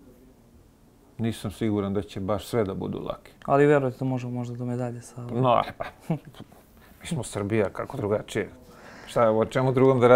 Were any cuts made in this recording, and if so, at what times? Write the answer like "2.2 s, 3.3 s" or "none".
3.4 s